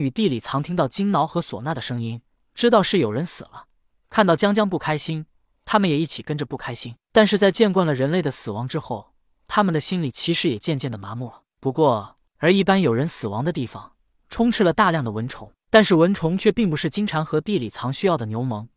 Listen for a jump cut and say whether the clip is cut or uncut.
cut